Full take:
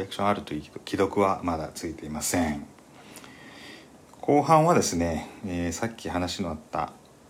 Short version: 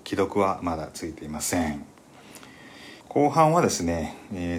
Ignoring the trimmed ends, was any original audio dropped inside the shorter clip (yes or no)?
yes